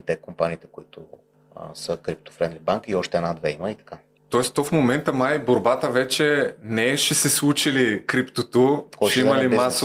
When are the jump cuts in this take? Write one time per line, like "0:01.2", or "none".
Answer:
none